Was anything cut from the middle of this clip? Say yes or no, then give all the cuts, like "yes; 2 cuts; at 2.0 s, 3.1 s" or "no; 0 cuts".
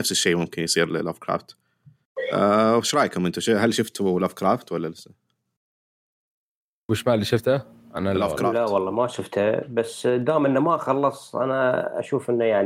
no; 0 cuts